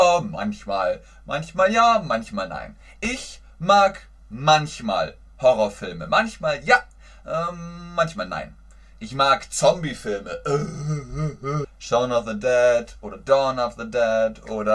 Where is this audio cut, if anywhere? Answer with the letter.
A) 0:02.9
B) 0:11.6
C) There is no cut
B